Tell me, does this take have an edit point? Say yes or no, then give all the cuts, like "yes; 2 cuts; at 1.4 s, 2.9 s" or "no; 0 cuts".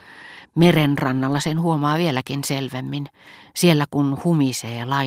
no; 0 cuts